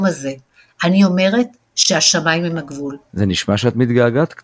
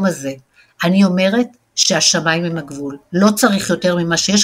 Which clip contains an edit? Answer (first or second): first